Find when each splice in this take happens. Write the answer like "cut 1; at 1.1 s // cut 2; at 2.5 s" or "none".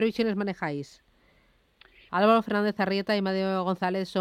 cut 1; at 2.1 s

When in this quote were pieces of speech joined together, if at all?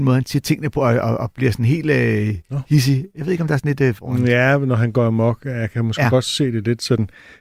cut 1; at 4.0 s

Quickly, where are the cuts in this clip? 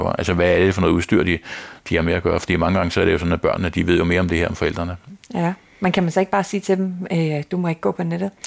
none

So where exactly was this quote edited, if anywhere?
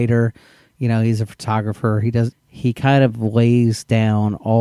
cut 1; at 2.3 s

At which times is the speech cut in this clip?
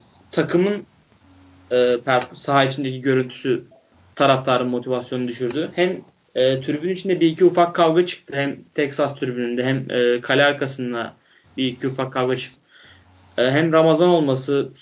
cut 1; at 12.6 s

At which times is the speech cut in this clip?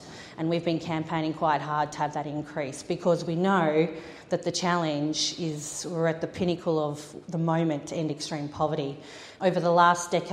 none

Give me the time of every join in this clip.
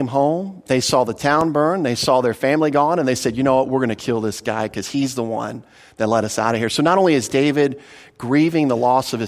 none

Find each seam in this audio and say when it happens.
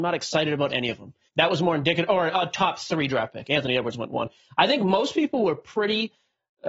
cut 1; at 1.3 s

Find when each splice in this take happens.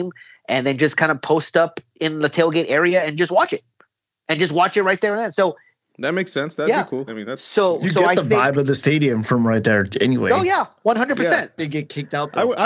cut 1; at 7.1 s // cut 2; at 11.6 s

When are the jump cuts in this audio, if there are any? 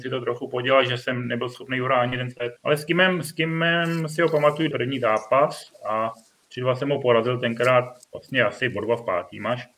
cut 1; at 2.6 s // cut 2; at 4.7 s

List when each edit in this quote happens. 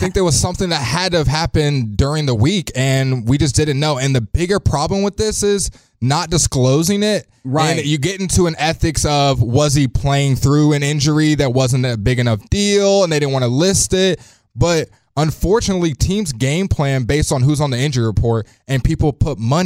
none

